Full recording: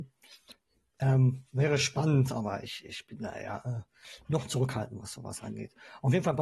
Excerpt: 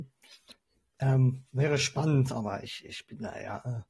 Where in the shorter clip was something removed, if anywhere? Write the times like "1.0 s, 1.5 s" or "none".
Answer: none